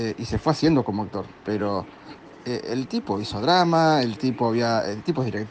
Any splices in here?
yes; 1 cut; at 1.4 s

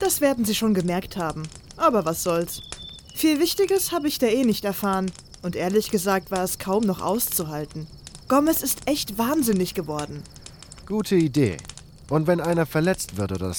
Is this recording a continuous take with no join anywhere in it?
no; 1 cut; at 10.8 s

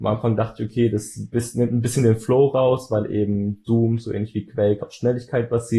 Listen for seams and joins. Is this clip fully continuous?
no; 1 cut; at 4.8 s

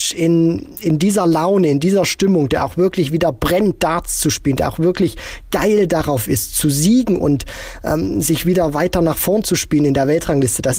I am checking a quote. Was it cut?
no; 0 cuts

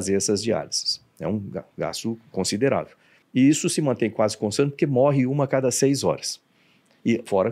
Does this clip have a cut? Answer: yes; 1 cut; at 3.2 s

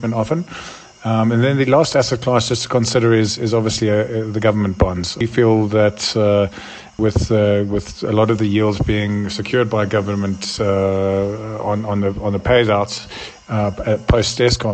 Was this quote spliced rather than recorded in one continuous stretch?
no; 0 cuts

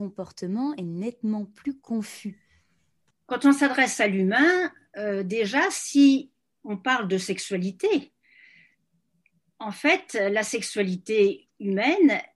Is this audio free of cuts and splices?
yes; 0 cuts

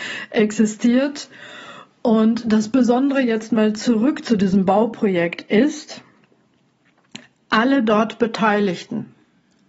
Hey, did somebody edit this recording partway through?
no; 0 cuts

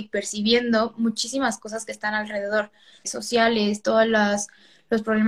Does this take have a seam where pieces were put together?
yes; 1 cut; at 3.0 s

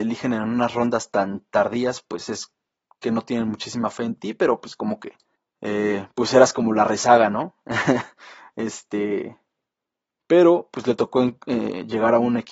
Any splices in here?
no; 0 cuts

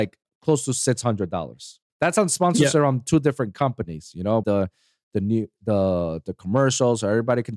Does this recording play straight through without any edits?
no; 2 cuts; at 1.9 s, 4.4 s

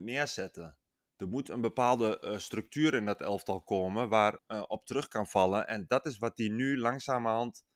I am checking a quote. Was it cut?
yes; 1 cut; at 4.4 s

